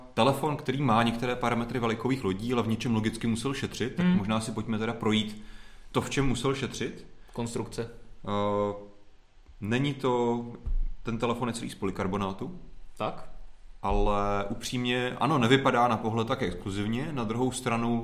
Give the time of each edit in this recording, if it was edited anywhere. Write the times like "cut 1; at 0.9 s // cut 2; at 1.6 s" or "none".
none